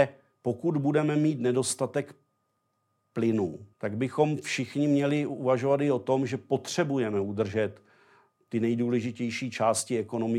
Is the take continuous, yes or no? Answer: no